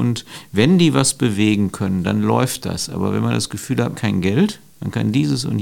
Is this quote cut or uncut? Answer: cut